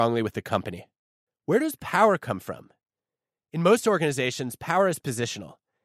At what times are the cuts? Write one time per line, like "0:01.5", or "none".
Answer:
0:01.3